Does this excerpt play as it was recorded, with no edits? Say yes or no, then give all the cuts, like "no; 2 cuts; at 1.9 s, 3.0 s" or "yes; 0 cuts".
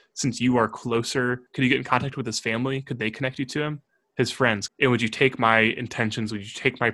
no; 2 cuts; at 1.5 s, 4.7 s